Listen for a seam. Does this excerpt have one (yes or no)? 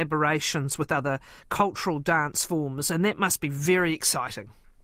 no